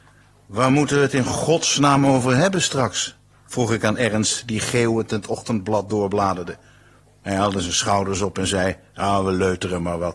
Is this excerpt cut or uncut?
uncut